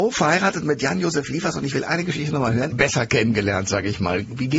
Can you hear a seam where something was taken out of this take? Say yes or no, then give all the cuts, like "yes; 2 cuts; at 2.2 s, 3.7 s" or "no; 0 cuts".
yes; 1 cut; at 2.7 s